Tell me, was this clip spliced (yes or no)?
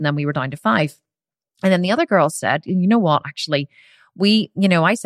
no